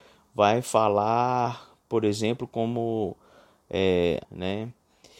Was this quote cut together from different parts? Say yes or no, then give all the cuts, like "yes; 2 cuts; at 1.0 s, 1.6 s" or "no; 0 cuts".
yes; 1 cut; at 4.2 s